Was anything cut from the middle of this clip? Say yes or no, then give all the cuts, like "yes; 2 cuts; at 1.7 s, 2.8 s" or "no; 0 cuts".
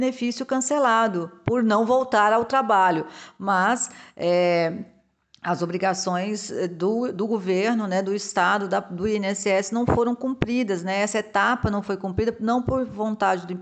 no; 0 cuts